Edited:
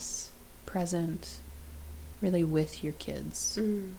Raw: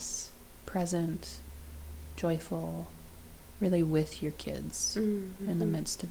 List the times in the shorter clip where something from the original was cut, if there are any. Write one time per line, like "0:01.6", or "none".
0:02.1

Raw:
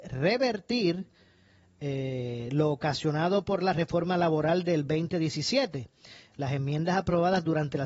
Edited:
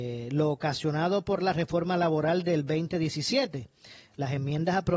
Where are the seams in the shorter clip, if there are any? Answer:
none

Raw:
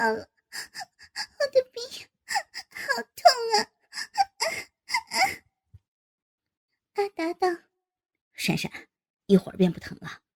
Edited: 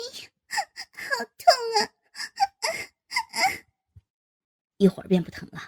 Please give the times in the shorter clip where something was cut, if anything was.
0:04.6

